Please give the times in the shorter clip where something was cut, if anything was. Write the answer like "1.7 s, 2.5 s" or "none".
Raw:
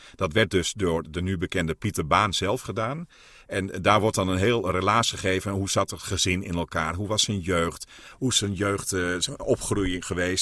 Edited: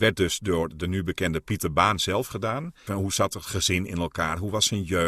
2.9 s